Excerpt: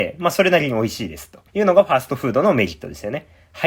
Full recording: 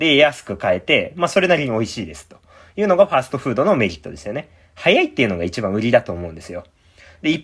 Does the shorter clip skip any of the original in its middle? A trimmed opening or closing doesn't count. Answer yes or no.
yes